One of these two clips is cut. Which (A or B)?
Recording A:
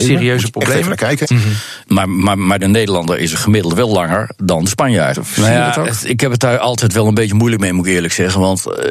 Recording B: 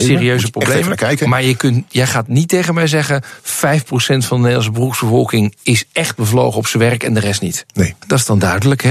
A